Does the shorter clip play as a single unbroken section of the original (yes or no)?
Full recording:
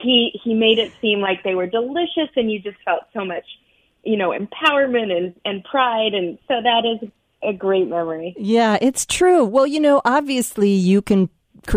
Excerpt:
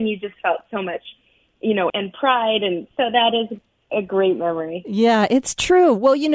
no